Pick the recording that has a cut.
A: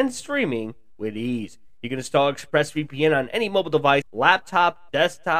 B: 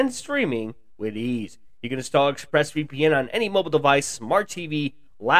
A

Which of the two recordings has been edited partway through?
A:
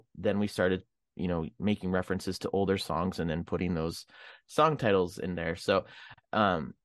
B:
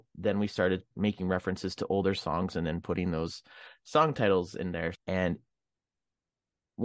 B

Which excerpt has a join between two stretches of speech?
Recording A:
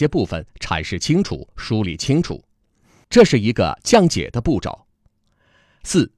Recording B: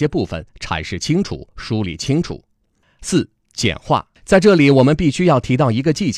B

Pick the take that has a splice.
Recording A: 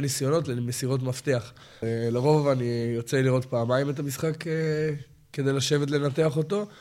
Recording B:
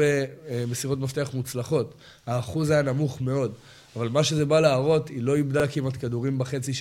A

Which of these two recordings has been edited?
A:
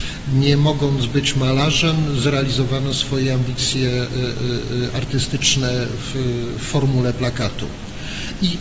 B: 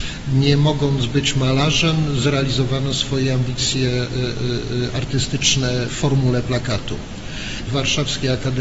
B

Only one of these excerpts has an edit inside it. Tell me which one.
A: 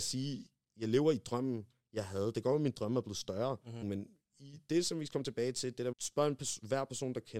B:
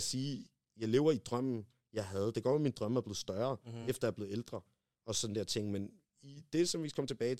A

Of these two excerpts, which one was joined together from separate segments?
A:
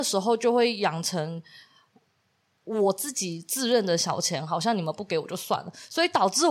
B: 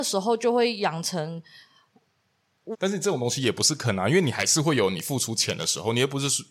B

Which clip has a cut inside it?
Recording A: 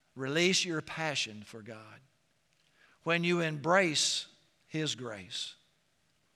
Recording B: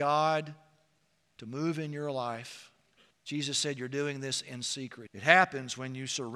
B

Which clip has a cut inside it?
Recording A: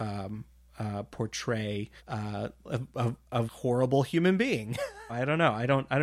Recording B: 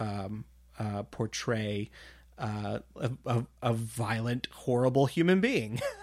A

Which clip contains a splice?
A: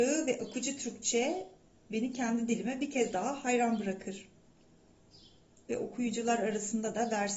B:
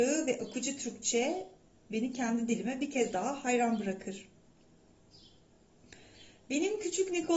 A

